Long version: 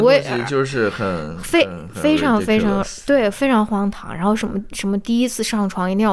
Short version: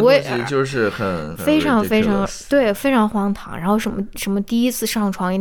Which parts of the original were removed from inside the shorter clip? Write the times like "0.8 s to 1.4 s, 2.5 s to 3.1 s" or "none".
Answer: 1.4 s to 1.9 s